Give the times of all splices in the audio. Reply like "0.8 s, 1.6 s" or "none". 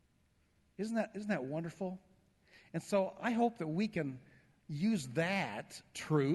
none